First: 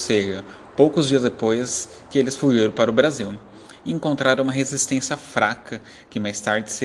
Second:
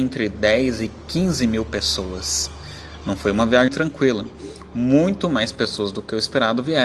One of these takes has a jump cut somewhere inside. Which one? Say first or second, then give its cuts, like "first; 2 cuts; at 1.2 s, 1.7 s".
second; 1 cut; at 3.7 s